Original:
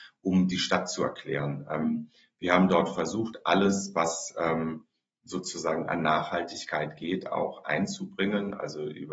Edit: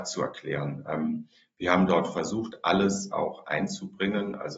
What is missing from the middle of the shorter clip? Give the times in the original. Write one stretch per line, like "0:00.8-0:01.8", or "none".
0:03.9-0:07.3